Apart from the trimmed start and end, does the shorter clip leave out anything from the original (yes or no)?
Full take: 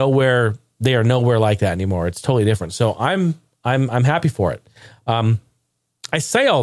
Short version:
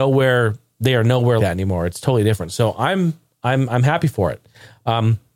yes